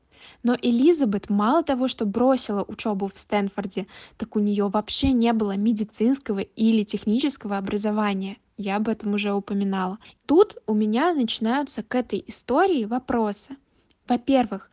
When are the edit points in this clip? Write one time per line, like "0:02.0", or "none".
0:10.2